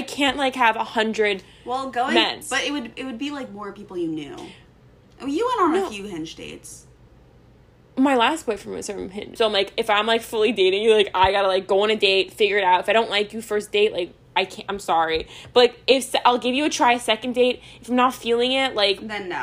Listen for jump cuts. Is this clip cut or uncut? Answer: cut